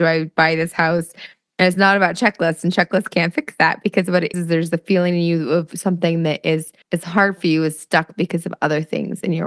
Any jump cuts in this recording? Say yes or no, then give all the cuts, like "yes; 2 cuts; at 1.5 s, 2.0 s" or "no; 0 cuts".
yes; 2 cuts; at 4.3 s, 6.8 s